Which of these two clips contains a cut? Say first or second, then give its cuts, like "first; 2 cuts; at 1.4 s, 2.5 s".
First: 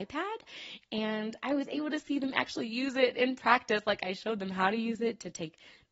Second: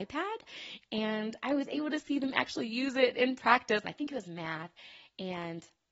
second; 1 cut; at 3.8 s